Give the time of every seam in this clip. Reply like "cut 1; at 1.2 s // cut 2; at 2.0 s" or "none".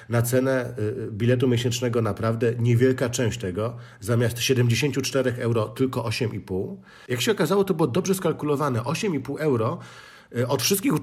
cut 1; at 7.1 s